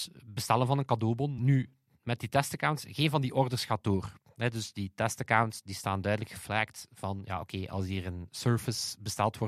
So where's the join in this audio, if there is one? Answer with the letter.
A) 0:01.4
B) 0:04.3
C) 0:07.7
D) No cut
A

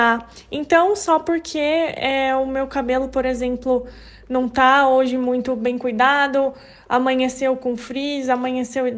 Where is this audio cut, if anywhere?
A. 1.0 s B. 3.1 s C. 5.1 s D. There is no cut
D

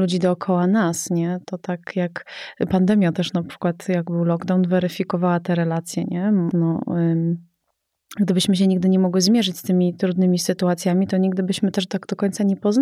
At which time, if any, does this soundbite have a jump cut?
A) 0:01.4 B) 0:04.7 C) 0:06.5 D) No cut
C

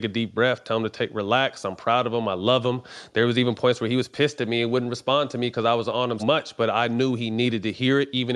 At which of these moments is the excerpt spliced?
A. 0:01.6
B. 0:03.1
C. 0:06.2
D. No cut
C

